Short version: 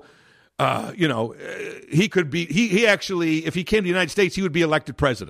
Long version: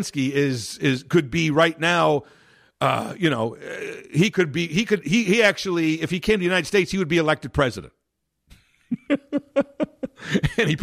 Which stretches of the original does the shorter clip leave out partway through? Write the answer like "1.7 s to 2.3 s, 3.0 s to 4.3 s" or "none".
4.7 s to 5.0 s